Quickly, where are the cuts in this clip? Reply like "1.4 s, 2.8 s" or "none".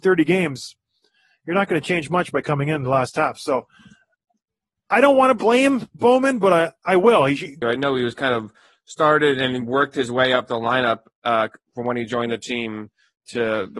7.6 s

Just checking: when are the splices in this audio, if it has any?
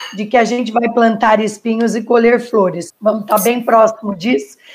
2.9 s

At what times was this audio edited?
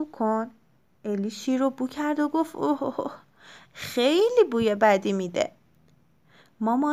2.8 s

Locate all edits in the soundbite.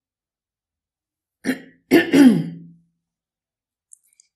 none

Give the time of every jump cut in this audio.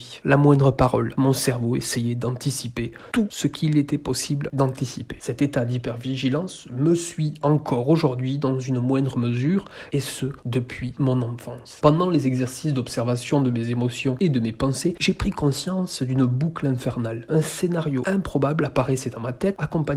none

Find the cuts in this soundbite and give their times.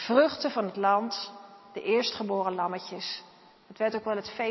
none

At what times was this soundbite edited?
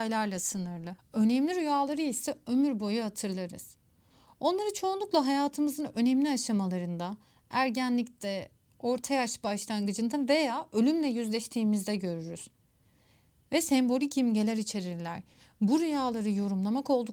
1.0 s

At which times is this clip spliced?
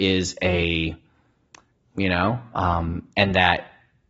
1.8 s

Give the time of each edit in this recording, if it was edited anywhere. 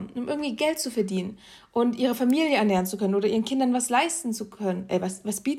none

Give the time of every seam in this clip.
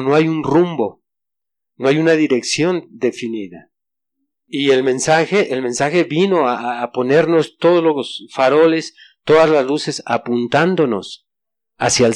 none

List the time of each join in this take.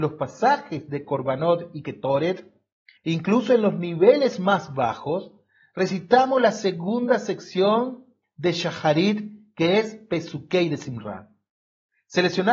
3.0 s

